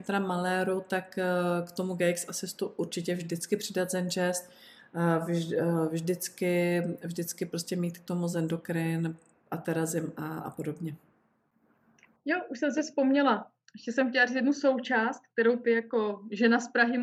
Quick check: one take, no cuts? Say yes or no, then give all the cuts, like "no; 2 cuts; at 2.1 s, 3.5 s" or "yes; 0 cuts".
yes; 0 cuts